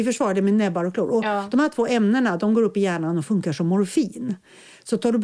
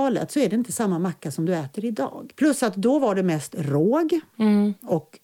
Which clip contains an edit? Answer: second; 1 cut; at 2.3 s

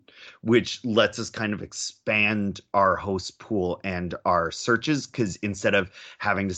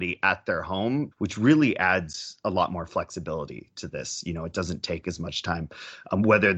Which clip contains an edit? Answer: second; 1 cut; at 1.1 s

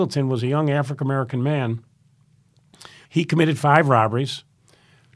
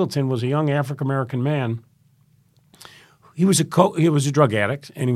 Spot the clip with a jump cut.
first; 1 cut; at 3.1 s

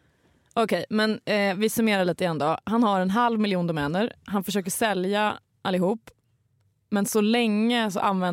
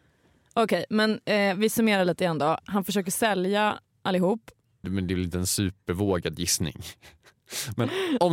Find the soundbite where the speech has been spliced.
second; 2 cuts; at 2.6 s, 4.8 s

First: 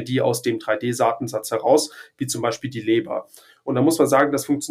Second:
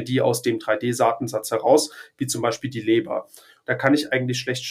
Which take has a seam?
second; 1 cut; at 3.6 s

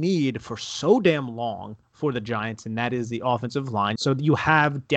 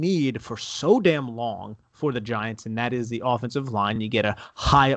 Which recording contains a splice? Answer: first; 1 cut; at 4.0 s

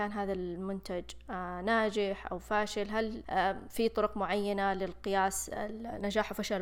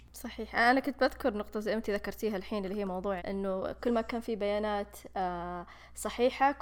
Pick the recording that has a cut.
second; 1 cut; at 3.2 s

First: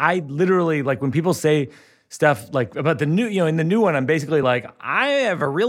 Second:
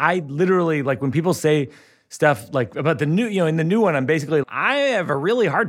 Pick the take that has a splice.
second; 1 cut; at 4.4 s

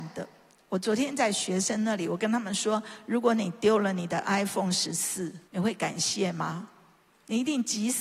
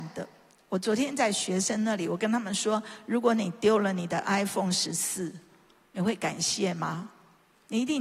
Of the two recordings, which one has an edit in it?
first; 1 cut; at 5.5 s

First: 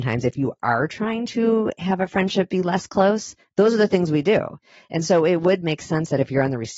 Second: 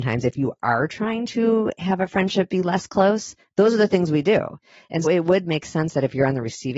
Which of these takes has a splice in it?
second; 1 cut; at 5.0 s

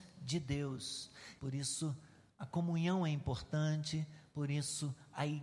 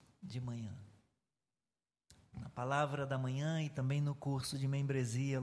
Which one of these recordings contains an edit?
first; 1 cut; at 1.4 s

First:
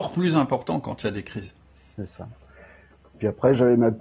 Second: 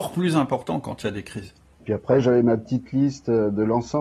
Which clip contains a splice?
second; 1 cut; at 1.7 s

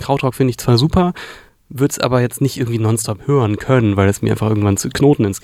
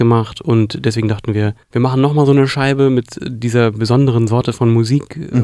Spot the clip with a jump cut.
second; 1 cut; at 1.6 s

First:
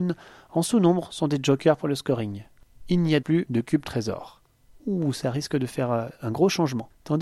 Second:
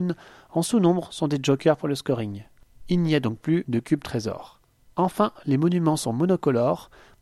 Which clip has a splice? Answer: first; 2 cuts; at 3.2 s, 4.7 s

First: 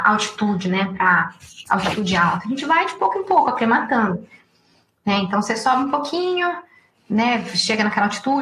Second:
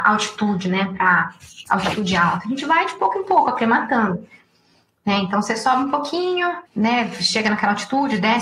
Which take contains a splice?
second; 1 cut; at 6.7 s

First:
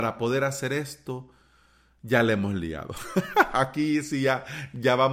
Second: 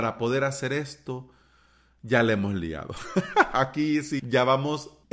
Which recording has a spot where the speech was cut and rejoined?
second; 1 cut; at 4.2 s

